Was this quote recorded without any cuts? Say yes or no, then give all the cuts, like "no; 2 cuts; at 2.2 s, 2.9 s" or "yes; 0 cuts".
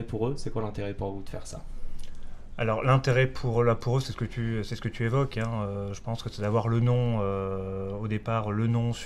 yes; 0 cuts